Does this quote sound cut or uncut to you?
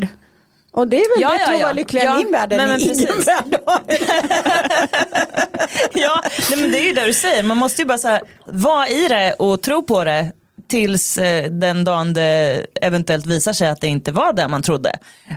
uncut